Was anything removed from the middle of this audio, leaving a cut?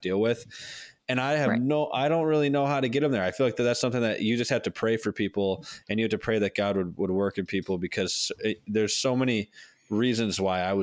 no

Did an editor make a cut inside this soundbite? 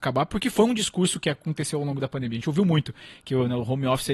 no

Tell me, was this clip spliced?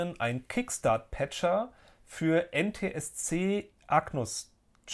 no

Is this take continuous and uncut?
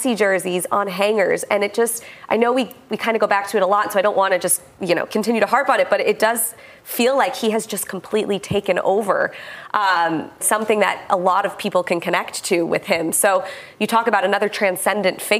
no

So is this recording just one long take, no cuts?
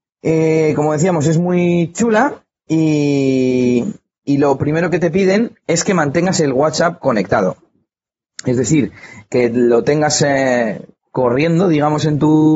yes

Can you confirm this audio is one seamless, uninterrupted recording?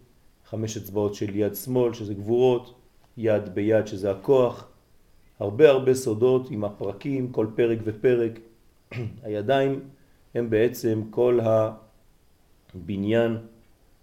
yes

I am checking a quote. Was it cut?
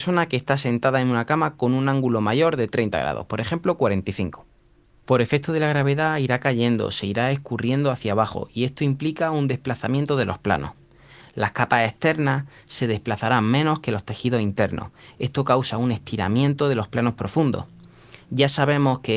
no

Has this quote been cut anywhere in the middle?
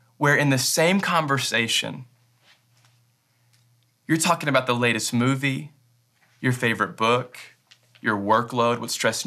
no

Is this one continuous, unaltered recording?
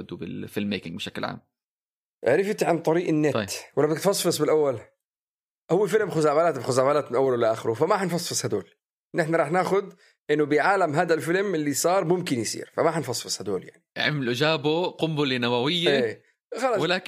no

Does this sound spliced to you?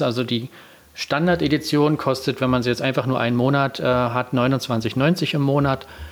no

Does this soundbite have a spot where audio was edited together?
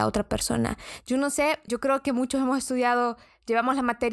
yes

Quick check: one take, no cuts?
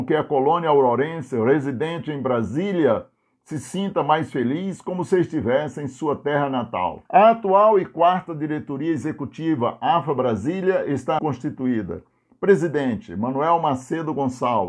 no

